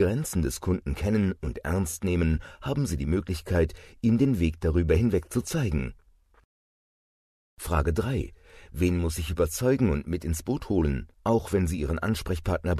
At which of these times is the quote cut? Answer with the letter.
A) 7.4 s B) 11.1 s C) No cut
B